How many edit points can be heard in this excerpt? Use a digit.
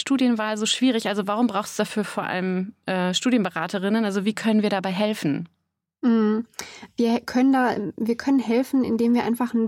0